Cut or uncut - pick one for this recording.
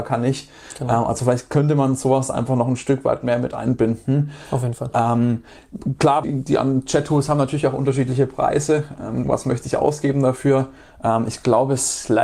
cut